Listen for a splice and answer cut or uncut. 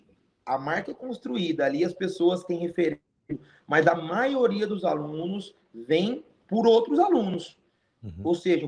uncut